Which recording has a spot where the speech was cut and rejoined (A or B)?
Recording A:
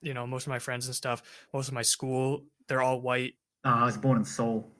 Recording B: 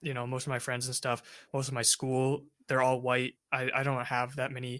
A